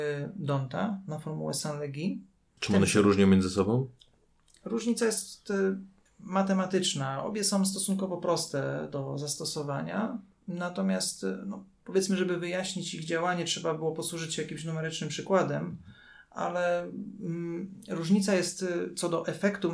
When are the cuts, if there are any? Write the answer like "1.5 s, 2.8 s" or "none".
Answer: none